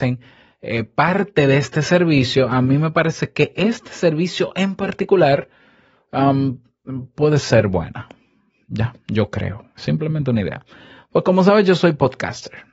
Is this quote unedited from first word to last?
yes; 0 cuts

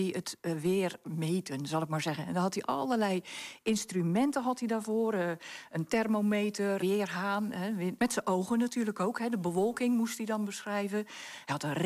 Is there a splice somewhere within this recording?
yes; 2 cuts; at 6.8 s, 8.0 s

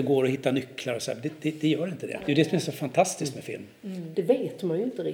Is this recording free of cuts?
no; 2 cuts; at 2.2 s, 4.1 s

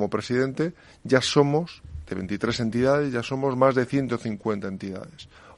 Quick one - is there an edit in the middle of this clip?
no; 0 cuts

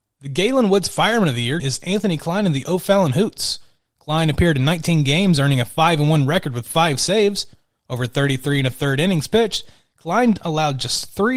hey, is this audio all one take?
no; 1 cut; at 1.6 s

